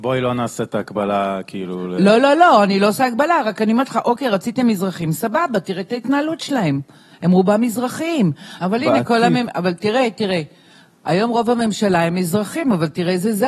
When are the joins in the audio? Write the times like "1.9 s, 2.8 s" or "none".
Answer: 8.6 s